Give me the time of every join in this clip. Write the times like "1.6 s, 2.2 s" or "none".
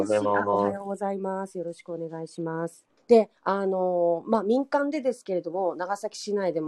3.0 s